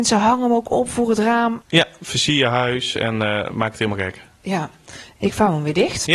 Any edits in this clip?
yes; 1 cut; at 1.6 s

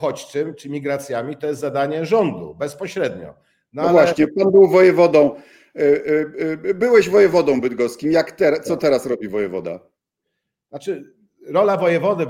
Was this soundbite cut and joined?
no; 0 cuts

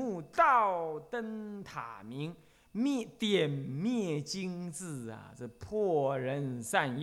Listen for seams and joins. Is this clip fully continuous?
yes; 0 cuts

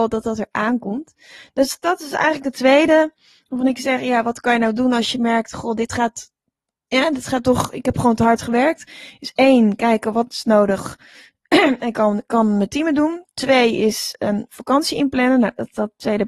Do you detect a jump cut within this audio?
no; 0 cuts

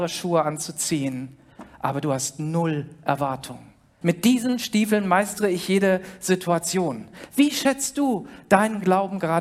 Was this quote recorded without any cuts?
no; 1 cut; at 4.0 s

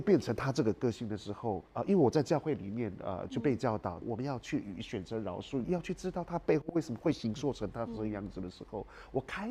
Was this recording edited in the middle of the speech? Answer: yes; 3 cuts; at 1.7 s, 4.0 s, 5.6 s

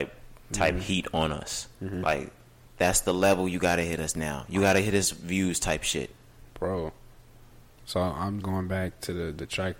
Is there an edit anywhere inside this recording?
yes; 1 cut; at 8.4 s

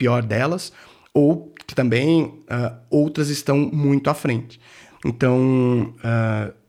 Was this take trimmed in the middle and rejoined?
yes; 1 cut; at 4.9 s

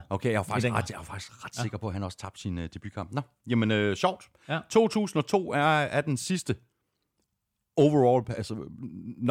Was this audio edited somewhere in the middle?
no; 0 cuts

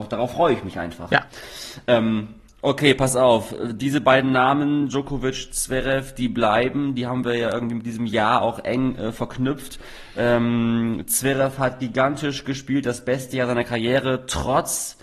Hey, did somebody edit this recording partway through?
no; 0 cuts

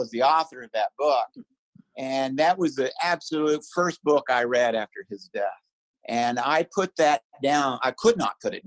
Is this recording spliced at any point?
no; 0 cuts

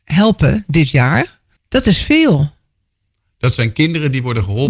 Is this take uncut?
no; 1 cut; at 1.6 s

